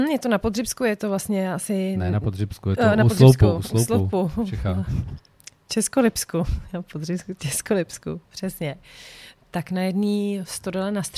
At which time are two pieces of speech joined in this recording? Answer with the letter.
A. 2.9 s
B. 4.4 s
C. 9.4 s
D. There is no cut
D